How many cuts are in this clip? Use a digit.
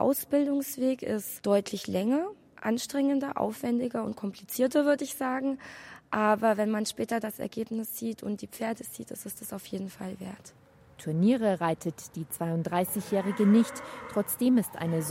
0